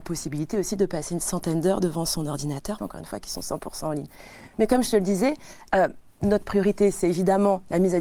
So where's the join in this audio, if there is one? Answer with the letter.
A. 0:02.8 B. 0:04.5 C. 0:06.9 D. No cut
A